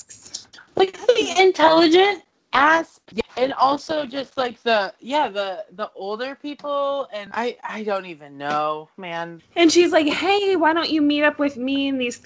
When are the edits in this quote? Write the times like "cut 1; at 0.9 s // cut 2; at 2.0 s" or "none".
cut 1; at 9.4 s